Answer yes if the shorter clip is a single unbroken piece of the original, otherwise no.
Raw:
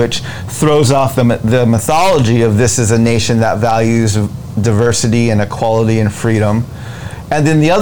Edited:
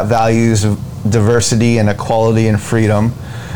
yes